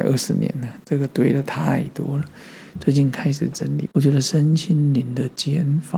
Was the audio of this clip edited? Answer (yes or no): yes